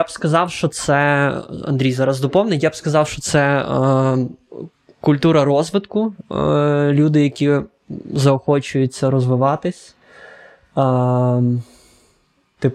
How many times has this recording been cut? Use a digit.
0